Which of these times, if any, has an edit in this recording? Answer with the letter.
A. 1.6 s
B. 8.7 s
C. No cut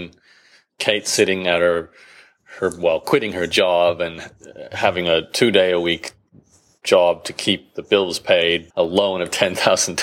B